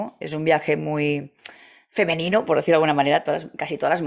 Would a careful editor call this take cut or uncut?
uncut